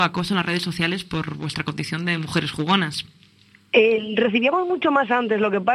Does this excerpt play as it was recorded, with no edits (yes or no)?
yes